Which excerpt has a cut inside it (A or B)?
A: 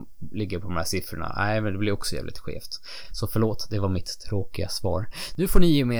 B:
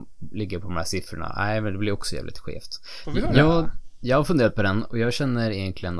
B